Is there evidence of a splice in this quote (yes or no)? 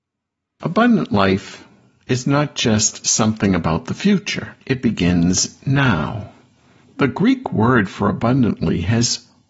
yes